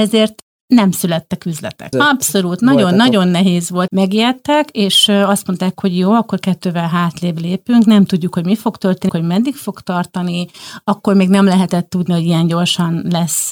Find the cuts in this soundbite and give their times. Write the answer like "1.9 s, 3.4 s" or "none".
1.9 s, 3.9 s, 9.1 s